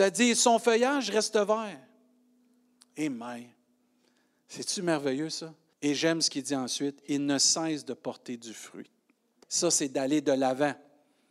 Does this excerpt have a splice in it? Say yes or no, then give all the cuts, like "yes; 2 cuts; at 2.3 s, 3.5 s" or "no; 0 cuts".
yes; 2 cuts; at 5.7 s, 9.4 s